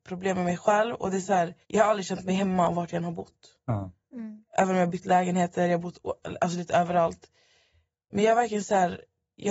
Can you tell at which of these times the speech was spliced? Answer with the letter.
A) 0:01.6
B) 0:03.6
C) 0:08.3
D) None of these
A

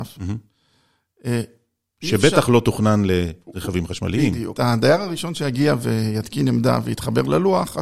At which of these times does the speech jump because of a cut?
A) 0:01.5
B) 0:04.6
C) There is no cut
B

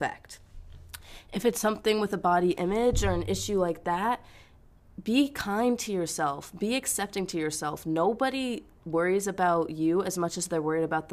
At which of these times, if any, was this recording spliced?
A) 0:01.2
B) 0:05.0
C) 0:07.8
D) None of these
D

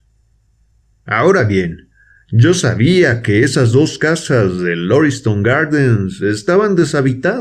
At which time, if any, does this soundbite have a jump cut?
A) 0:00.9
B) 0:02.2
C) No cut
A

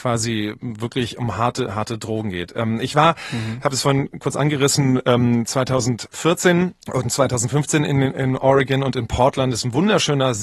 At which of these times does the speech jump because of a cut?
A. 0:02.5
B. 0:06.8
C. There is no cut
B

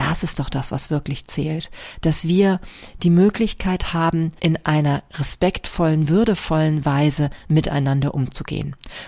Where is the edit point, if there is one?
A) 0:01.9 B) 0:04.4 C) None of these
B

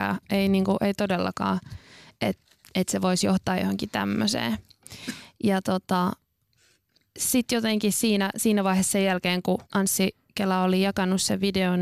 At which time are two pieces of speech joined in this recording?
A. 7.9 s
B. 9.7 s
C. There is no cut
B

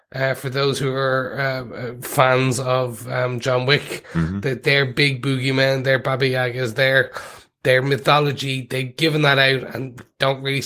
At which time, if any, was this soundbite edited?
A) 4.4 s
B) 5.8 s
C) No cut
C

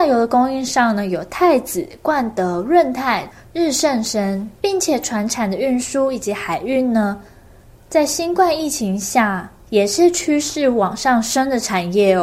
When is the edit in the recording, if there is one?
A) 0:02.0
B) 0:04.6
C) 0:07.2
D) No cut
B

